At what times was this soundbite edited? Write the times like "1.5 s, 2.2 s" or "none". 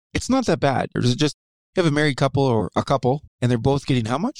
0.9 s, 3.3 s